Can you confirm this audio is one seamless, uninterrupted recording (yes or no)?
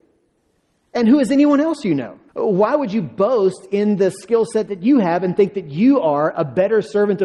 no